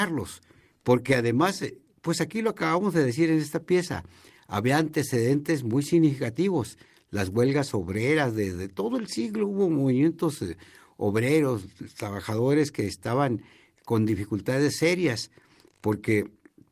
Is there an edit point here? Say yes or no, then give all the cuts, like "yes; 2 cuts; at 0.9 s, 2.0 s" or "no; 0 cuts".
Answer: no; 0 cuts